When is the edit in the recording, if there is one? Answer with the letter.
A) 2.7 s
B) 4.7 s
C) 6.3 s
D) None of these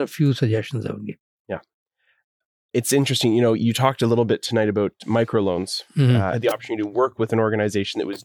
C